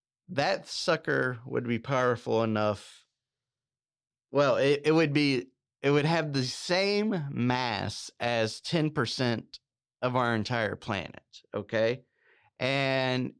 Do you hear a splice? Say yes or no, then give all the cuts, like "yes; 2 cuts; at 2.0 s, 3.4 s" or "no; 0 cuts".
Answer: no; 0 cuts